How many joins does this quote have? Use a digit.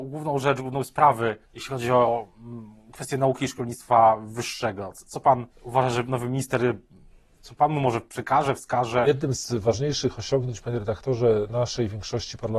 2